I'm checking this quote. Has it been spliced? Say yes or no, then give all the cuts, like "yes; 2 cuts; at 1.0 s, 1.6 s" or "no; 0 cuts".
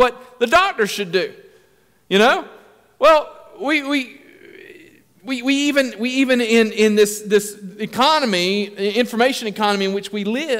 no; 0 cuts